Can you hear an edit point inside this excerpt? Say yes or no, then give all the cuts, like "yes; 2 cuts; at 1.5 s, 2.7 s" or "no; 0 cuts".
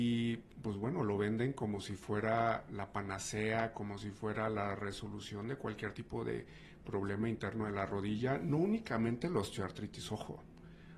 no; 0 cuts